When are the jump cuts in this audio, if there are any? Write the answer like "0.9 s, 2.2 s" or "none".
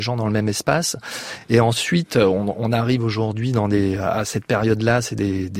none